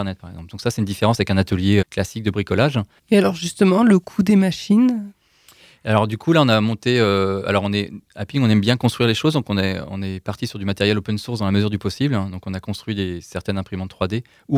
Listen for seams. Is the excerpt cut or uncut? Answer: cut